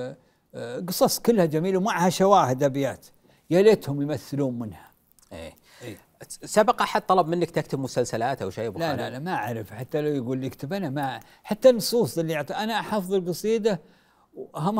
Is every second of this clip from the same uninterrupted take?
yes; 0 cuts

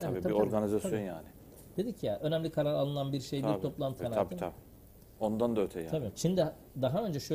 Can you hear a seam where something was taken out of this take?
yes; 2 cuts; at 4.0 s, 6.1 s

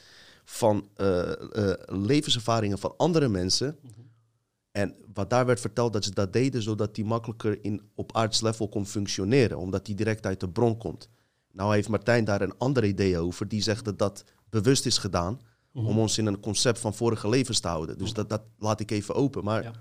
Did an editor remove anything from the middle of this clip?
no; 0 cuts

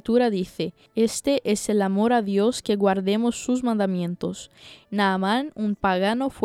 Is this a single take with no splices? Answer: no; 1 cut; at 4.8 s

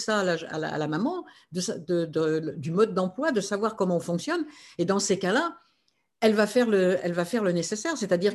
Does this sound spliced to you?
no; 0 cuts

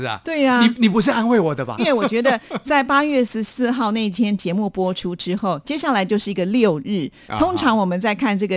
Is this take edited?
yes; 1 cut; at 1.8 s

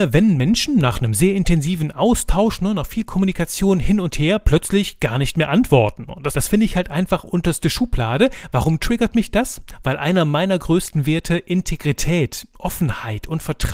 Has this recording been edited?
yes; 1 cut; at 6.3 s

